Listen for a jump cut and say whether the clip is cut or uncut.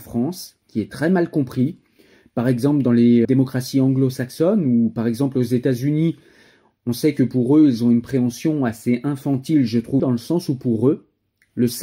cut